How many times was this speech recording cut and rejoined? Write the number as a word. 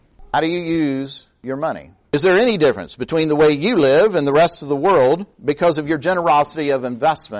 one